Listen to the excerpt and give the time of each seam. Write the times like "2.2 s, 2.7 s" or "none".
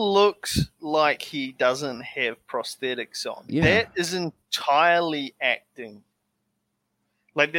3.5 s